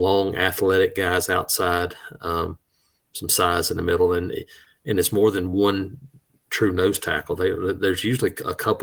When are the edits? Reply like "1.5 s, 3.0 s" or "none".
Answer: none